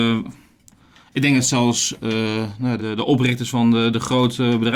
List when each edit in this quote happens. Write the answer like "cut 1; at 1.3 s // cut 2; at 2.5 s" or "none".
cut 1; at 2.8 s